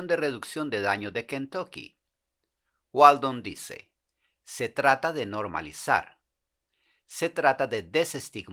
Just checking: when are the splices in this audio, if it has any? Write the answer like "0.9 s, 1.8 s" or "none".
none